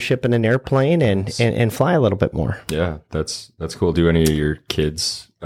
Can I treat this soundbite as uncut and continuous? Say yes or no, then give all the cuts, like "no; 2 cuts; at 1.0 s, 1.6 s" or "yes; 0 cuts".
yes; 0 cuts